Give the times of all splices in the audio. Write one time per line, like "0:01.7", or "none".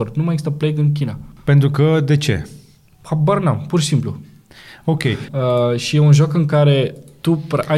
0:01.4
0:05.3